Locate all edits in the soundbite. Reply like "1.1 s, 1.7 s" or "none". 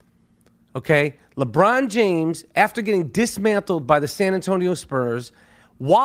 none